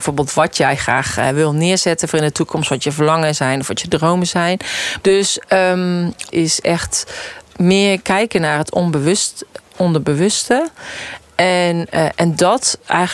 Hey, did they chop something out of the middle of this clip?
yes; 2 cuts; at 5.0 s, 6.3 s

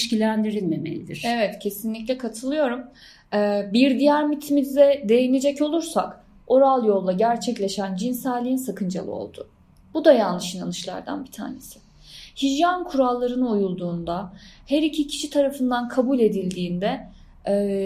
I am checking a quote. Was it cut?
no; 0 cuts

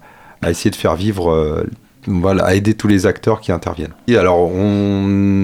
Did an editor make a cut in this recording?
yes; 1 cut; at 4.1 s

